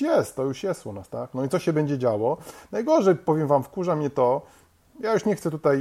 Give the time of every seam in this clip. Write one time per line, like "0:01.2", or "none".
none